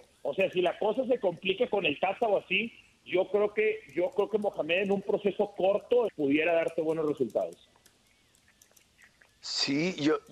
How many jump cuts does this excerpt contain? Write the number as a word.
one